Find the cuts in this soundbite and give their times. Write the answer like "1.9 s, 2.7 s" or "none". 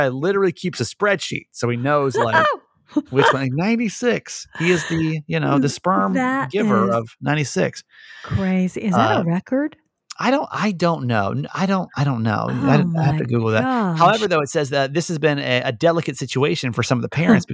none